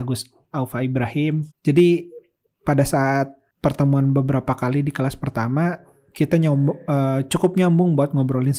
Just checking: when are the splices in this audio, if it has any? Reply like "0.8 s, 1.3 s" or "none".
1.5 s